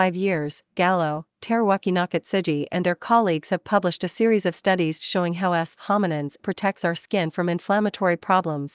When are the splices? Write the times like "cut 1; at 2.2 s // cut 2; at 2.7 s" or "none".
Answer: cut 1; at 6.4 s